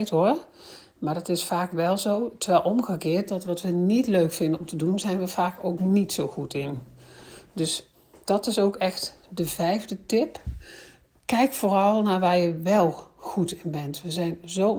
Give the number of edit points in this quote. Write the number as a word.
zero